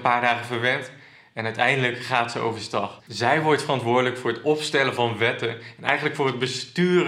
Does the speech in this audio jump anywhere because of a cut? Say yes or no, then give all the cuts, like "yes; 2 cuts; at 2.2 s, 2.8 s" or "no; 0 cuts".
yes; 1 cut; at 3.0 s